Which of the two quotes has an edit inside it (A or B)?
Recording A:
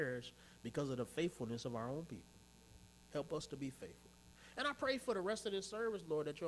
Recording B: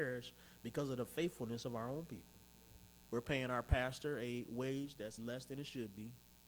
B